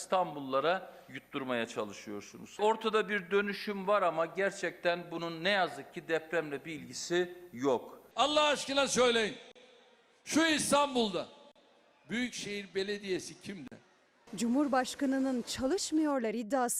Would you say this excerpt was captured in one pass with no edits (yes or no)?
yes